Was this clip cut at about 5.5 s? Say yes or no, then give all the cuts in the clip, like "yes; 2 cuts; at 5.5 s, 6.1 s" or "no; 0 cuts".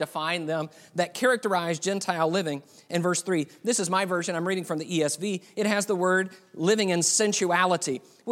no; 0 cuts